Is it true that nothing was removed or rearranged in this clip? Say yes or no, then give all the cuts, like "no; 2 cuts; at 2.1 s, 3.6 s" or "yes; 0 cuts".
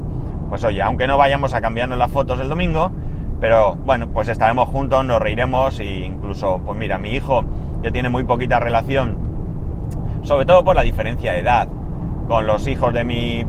yes; 0 cuts